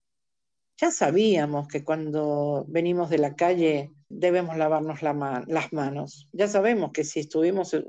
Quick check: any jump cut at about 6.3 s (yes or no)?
no